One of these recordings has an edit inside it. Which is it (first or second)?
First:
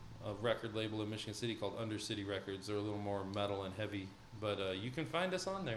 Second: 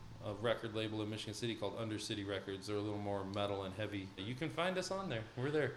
second